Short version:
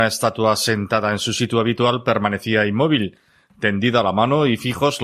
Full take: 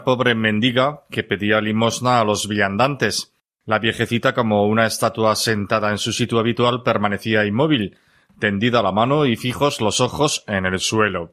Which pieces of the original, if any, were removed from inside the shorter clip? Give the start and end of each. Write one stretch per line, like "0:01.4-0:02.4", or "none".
none